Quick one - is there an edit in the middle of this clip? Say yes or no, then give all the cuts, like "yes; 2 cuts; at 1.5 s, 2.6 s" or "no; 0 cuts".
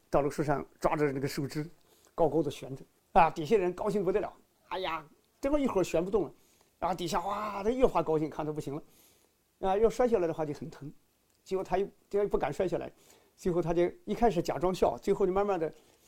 no; 0 cuts